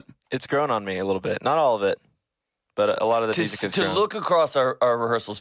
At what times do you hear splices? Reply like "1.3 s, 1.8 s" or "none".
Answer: none